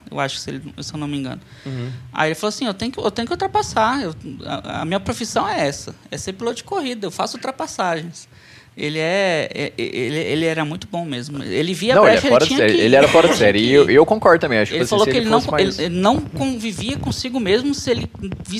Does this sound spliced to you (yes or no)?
no